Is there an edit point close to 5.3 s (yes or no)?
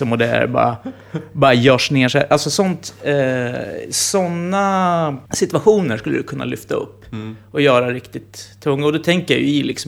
yes